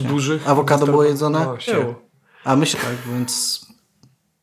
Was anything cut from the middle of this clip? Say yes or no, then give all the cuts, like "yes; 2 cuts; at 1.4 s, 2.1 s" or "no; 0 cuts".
yes; 2 cuts; at 1.7 s, 2.7 s